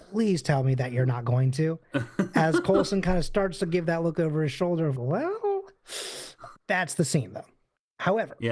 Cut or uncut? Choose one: cut